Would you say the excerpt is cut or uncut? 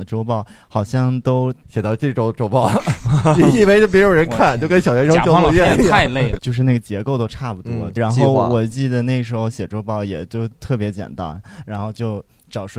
cut